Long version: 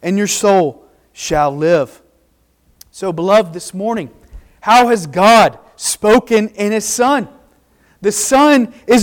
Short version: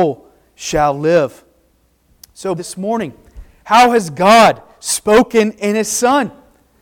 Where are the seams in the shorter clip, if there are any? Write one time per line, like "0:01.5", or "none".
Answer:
0:02.6